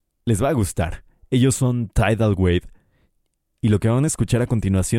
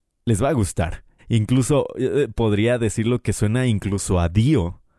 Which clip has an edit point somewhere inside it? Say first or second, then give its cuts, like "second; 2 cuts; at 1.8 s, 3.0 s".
second; 1 cut; at 1.2 s